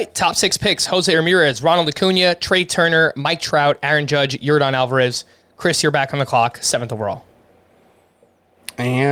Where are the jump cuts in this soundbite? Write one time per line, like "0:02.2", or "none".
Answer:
none